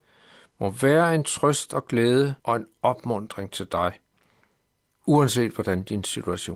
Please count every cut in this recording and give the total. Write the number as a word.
one